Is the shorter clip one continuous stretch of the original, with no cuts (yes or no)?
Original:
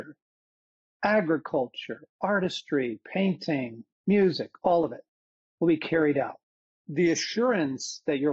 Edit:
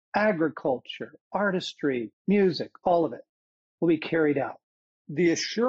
no